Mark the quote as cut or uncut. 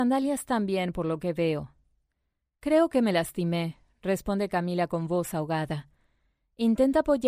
uncut